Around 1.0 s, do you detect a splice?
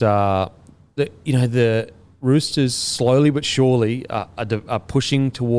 yes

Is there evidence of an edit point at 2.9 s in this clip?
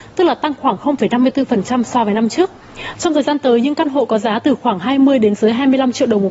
yes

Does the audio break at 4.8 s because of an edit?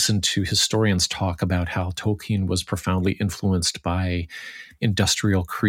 yes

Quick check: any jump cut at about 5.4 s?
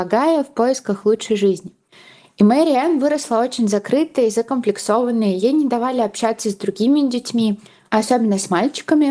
no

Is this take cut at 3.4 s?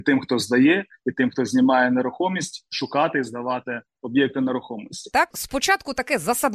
no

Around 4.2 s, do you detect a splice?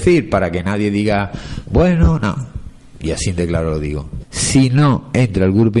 yes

